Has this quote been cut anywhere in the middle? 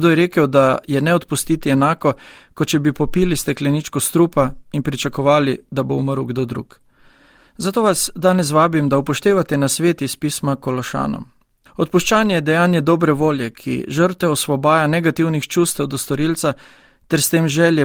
yes; 1 cut; at 11.7 s

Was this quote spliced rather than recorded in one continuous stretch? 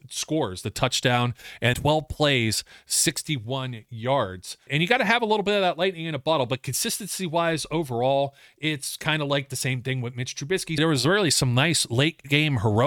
yes; 3 cuts; at 1.7 s, 4.7 s, 10.8 s

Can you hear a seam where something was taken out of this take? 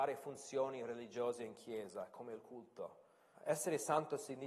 yes; 1 cut; at 3.3 s

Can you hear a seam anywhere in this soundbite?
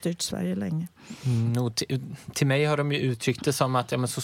no; 0 cuts

